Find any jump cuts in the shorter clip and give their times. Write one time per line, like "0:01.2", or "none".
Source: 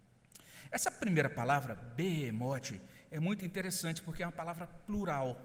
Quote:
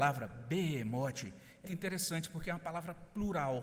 0:01.7